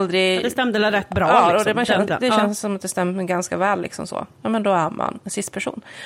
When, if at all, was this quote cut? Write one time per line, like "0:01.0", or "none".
0:02.1